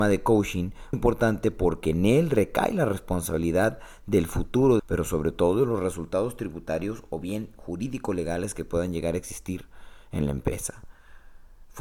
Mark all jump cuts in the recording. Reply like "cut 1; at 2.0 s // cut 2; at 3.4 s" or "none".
cut 1; at 0.9 s // cut 2; at 4.8 s